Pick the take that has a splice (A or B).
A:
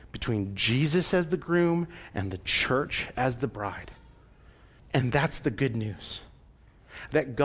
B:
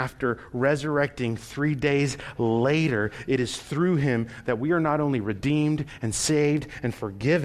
A